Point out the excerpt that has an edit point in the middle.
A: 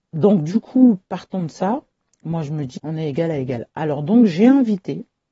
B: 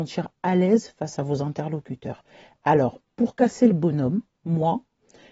A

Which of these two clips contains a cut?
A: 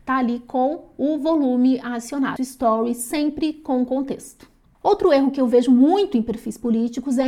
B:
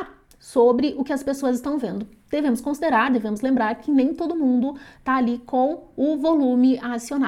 A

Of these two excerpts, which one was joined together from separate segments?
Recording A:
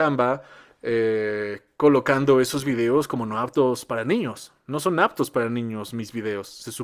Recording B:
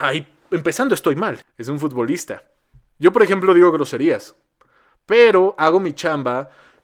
B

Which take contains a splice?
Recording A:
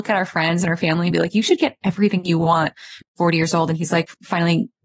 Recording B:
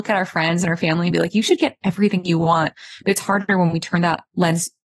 A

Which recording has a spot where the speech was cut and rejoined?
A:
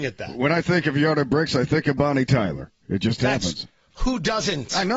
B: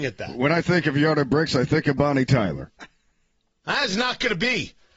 B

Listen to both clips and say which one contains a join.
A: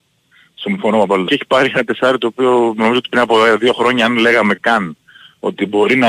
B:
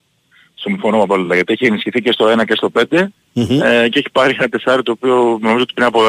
A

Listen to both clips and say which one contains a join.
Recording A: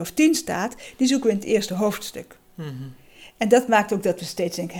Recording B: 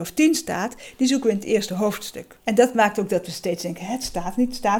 B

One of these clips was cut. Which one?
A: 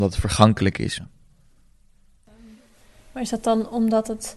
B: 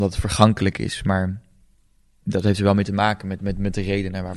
A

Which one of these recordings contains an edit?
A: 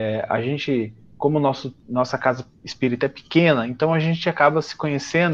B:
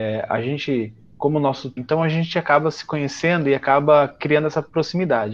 B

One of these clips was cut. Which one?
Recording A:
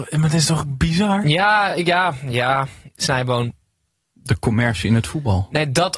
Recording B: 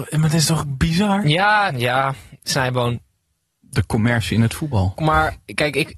B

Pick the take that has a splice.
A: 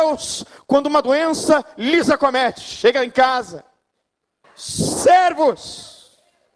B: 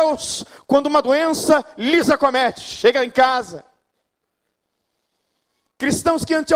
A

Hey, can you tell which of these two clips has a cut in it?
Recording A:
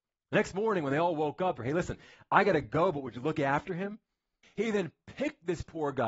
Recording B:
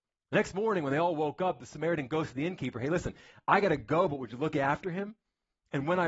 A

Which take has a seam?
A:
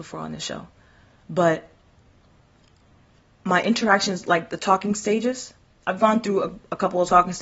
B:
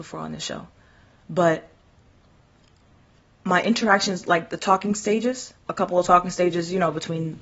B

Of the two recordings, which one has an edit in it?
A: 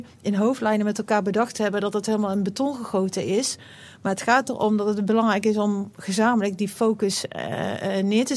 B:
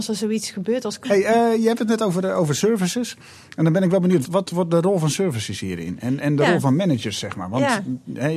B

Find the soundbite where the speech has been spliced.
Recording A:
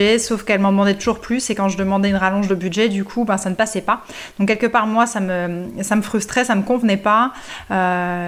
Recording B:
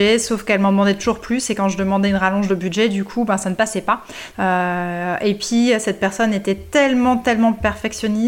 B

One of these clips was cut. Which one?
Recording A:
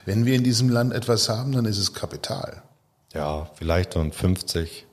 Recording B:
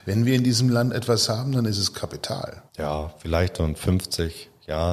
B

